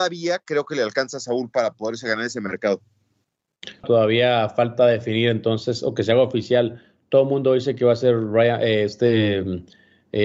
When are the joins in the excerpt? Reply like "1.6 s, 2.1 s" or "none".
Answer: 3.8 s

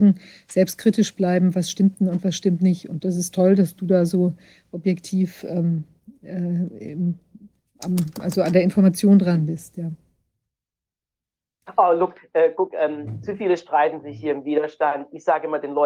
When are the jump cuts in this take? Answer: none

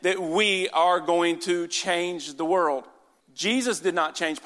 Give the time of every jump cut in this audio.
3.2 s

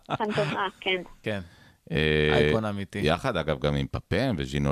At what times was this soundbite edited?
1.2 s

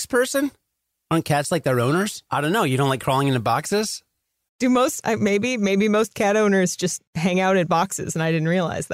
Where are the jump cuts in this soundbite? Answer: 2.3 s, 4.5 s

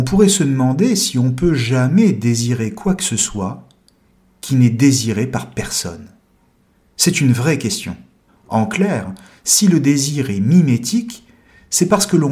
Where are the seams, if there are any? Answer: 8.3 s

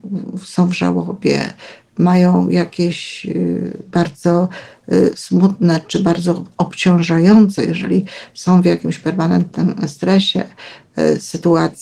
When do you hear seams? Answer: 7.6 s

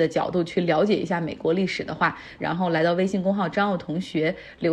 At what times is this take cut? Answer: 2.4 s

